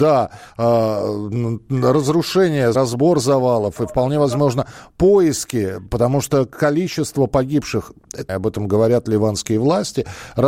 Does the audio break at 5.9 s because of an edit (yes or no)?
no